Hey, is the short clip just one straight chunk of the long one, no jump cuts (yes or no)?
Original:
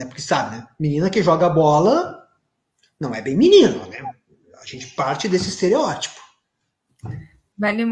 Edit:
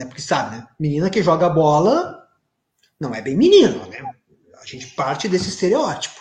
yes